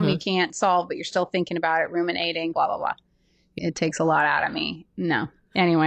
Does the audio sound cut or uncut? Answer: cut